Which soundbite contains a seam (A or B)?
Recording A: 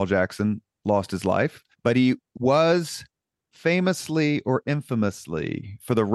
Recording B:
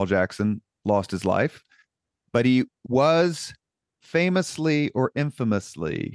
A